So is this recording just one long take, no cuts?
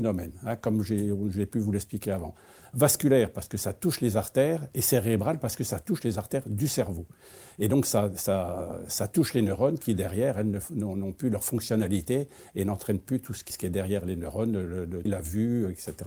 no; 2 cuts; at 13.5 s, 15.1 s

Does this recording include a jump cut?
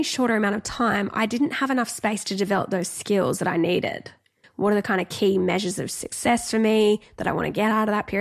yes; 1 cut; at 4.4 s

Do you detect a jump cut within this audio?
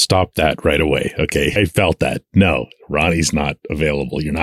yes; 1 cut; at 1.6 s

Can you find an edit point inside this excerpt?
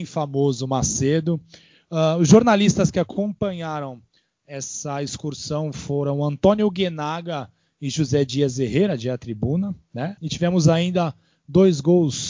yes; 1 cut; at 10.2 s

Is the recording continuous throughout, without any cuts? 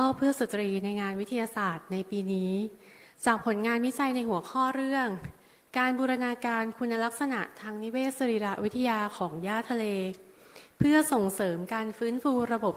yes; 0 cuts

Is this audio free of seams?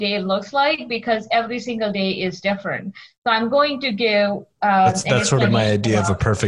yes; 0 cuts

